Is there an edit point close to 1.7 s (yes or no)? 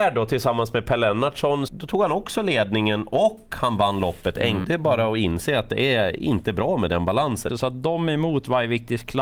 yes